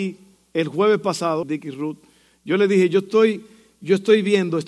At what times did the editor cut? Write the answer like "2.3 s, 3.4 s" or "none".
1.4 s

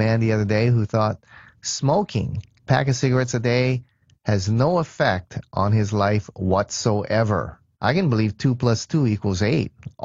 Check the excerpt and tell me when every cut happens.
7.7 s

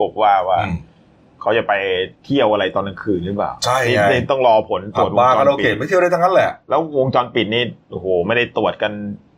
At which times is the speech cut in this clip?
2.1 s

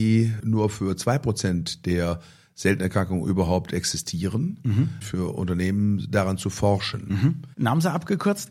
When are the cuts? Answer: 5.0 s, 7.5 s

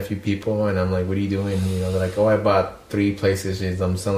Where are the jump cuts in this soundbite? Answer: none

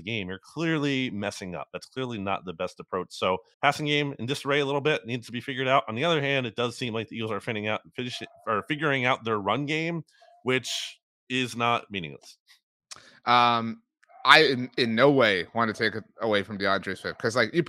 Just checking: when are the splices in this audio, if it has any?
3.5 s

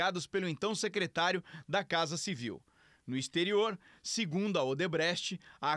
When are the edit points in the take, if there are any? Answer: none

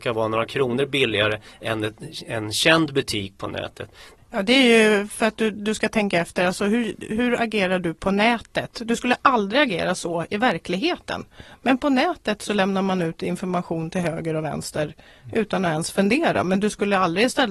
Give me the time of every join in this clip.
4.2 s

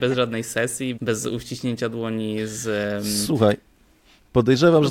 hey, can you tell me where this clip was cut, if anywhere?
1.0 s

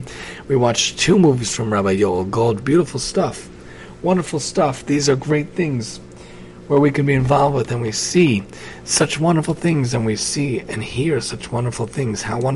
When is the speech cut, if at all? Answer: none

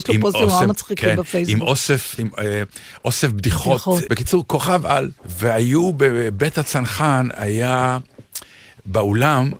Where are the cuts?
2.2 s, 4.0 s, 5.2 s

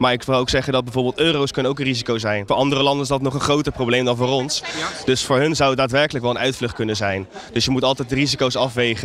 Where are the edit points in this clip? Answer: 2.5 s

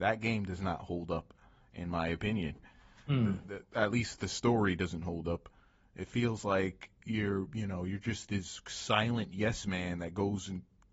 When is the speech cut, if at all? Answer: none

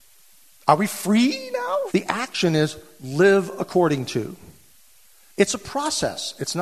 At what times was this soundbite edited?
1.9 s, 5.3 s

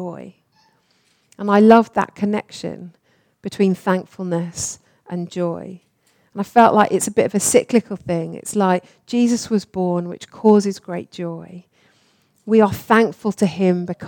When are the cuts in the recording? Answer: none

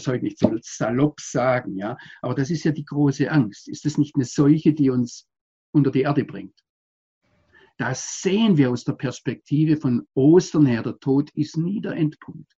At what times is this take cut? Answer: none

